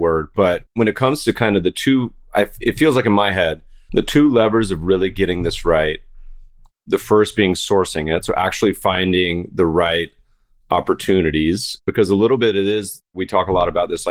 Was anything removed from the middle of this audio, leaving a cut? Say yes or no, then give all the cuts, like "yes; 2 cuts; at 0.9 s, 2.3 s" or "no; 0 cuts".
no; 0 cuts